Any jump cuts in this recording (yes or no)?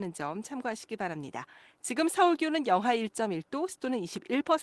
no